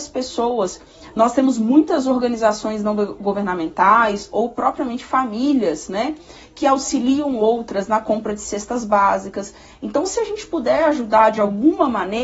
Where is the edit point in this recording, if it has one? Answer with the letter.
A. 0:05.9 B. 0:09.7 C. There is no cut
C